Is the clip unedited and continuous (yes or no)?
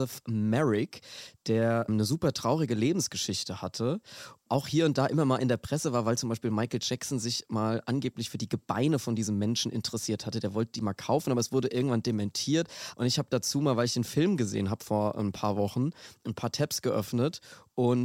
no